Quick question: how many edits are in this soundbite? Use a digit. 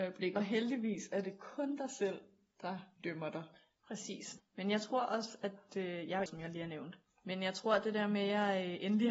2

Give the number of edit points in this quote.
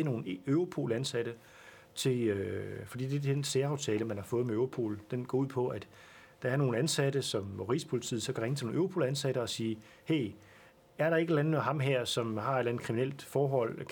0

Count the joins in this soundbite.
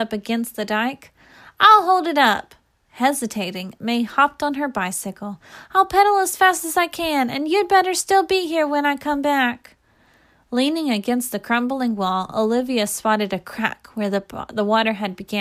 0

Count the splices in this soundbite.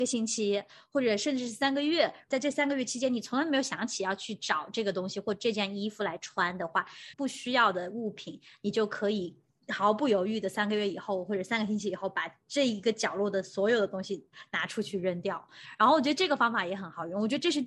1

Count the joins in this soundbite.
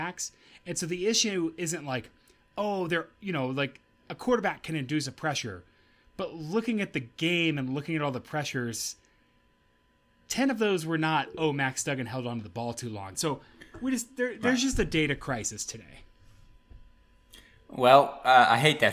1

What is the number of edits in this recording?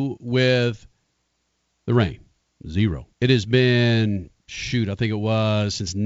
2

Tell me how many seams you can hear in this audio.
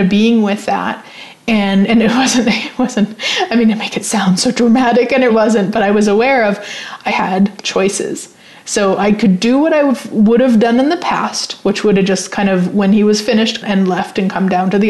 3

